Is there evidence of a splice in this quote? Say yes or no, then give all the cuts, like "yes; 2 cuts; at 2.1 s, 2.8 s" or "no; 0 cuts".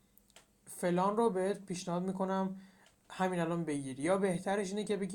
no; 0 cuts